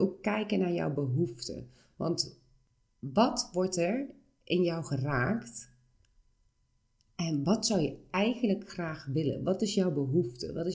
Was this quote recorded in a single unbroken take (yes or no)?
yes